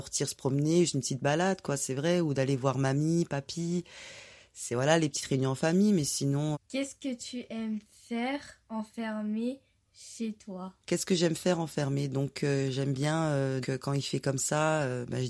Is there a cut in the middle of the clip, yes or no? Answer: yes